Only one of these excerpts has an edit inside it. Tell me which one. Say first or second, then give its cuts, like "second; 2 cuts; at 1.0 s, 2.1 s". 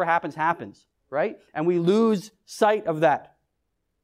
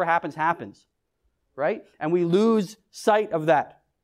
first; 1 cut; at 1.0 s